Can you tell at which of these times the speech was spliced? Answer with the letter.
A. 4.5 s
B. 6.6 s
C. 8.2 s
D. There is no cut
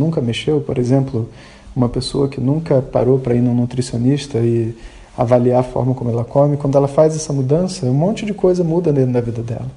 D